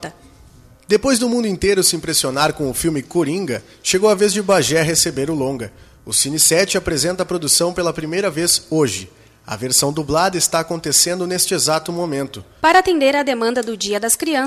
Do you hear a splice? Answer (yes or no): yes